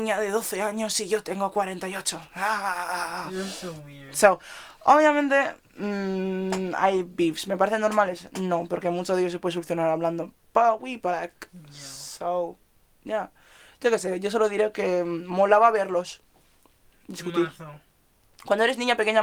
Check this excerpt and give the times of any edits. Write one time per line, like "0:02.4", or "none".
none